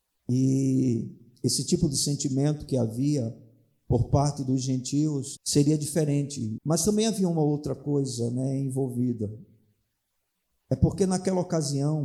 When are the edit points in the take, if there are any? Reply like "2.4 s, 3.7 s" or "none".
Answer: 5.4 s, 6.6 s